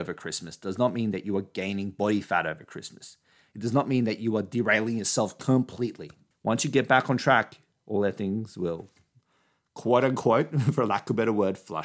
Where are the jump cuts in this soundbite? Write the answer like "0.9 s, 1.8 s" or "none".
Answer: 6.3 s